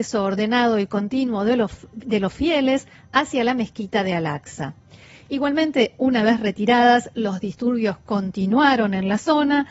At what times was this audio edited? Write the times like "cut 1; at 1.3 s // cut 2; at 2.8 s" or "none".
none